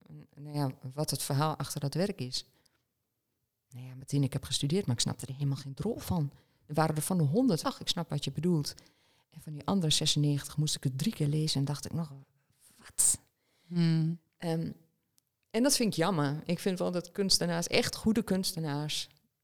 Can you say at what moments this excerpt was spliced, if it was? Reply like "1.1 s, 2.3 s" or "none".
7.6 s